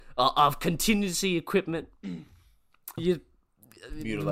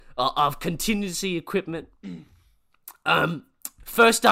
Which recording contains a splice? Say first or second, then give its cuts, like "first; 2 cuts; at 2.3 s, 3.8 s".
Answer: first; 1 cut; at 3.0 s